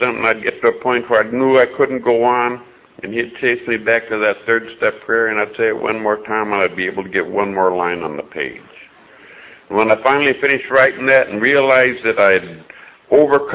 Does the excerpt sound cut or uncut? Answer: uncut